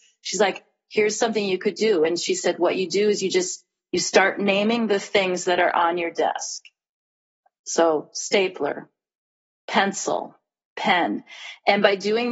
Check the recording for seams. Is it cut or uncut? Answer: uncut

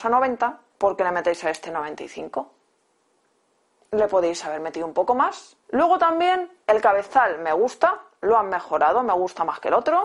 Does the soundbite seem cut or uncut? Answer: uncut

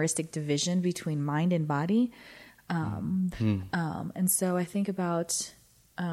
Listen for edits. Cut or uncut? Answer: cut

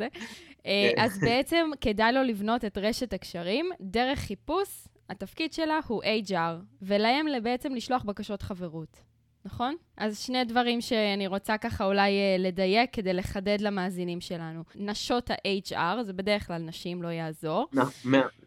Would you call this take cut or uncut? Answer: cut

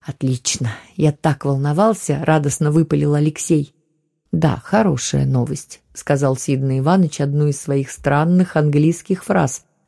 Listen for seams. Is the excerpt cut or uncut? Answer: uncut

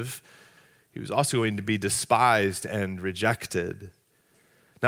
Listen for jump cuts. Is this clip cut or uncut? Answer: uncut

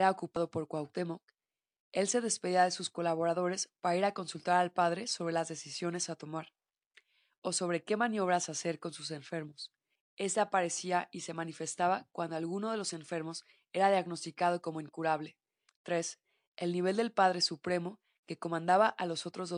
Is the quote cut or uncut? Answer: cut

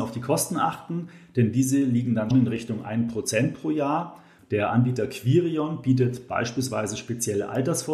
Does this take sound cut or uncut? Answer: cut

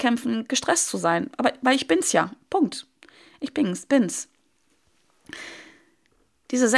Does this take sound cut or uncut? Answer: uncut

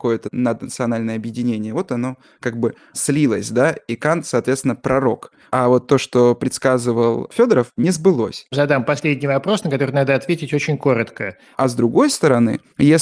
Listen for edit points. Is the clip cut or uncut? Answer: cut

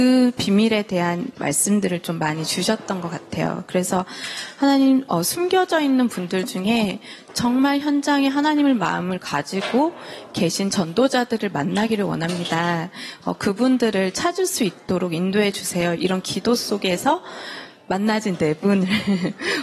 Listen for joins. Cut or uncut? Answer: uncut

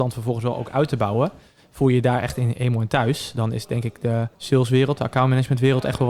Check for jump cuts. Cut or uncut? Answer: cut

